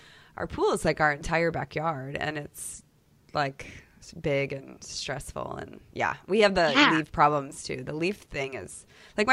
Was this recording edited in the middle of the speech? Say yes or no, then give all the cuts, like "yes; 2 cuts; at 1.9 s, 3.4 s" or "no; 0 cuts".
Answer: no; 0 cuts